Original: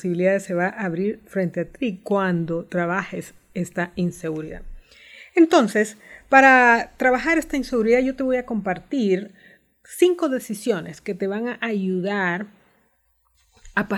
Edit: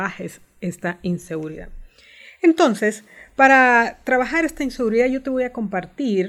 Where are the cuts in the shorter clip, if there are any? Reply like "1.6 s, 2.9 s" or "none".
none

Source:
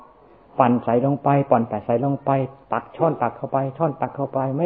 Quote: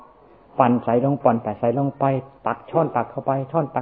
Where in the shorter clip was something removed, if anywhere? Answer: 1.2 s

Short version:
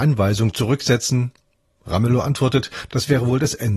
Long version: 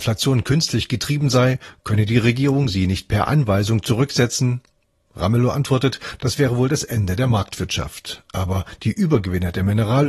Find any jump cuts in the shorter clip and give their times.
none

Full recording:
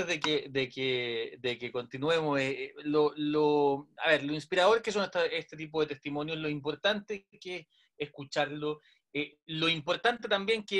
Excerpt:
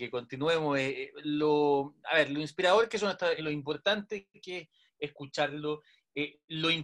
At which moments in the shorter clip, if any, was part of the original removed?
1.2 s, 3.4 s

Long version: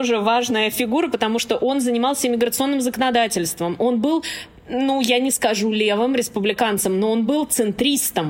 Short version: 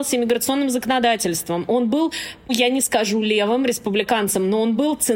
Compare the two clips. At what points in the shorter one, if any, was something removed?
2.5 s

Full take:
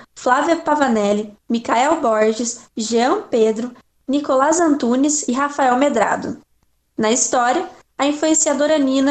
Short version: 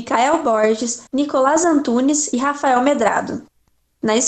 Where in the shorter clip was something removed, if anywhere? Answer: 1.1 s

